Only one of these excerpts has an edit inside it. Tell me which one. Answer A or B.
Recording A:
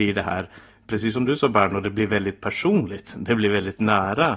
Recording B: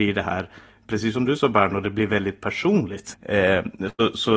B